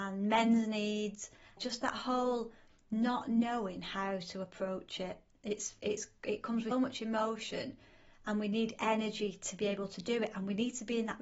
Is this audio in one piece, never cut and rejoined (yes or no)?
no